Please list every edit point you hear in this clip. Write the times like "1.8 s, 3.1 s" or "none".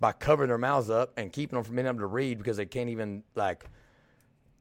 3.3 s